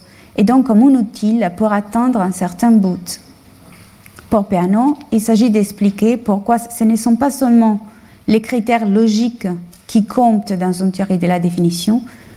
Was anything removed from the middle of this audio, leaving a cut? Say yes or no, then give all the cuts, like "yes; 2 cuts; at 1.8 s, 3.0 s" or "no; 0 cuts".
no; 0 cuts